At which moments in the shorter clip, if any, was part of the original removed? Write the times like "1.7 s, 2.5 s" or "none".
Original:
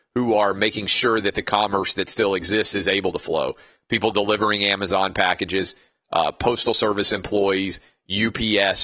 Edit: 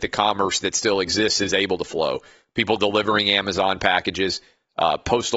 none